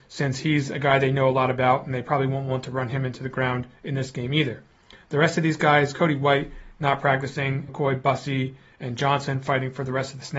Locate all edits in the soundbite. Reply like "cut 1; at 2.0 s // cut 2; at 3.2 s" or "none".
cut 1; at 7.7 s